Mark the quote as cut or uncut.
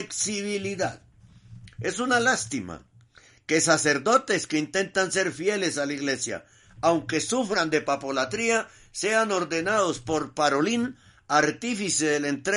uncut